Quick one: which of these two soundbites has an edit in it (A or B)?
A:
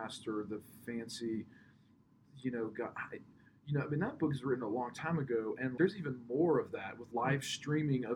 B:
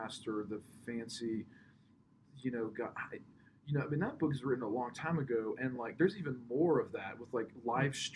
A